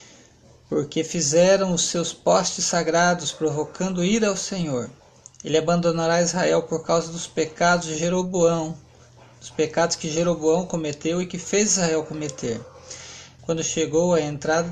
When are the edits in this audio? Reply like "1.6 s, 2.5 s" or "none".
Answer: 13.4 s

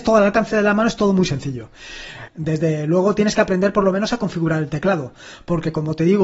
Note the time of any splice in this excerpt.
2.3 s

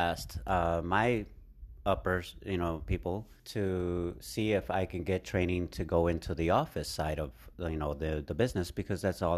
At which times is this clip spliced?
3.4 s

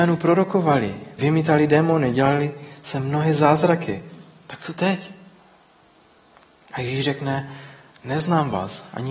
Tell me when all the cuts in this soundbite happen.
1.2 s

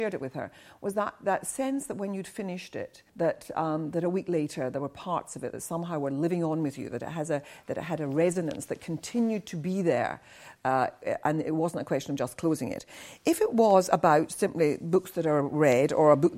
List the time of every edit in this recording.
3.1 s

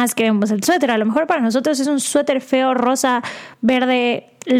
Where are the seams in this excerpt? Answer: none

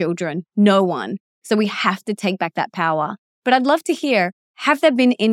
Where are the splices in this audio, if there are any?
none

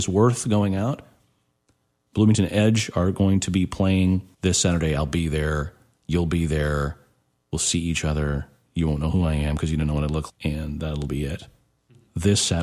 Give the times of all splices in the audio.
4.3 s, 10.3 s

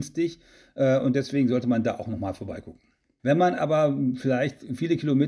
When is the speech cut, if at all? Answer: 3.2 s

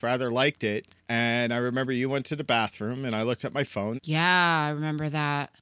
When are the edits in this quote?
4.0 s

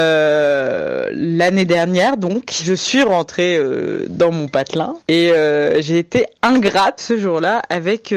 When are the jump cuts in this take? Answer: 5.0 s, 7.0 s

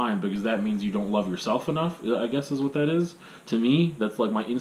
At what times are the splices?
none

